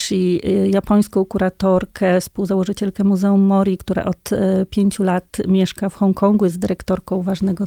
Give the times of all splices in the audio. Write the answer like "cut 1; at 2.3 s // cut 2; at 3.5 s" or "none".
none